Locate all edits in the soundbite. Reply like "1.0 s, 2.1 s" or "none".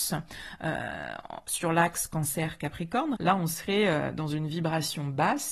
3.2 s